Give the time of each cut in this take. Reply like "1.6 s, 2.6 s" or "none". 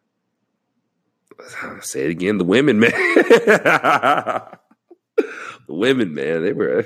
none